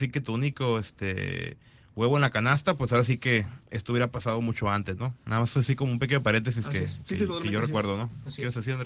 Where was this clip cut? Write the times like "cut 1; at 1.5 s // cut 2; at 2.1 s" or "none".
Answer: none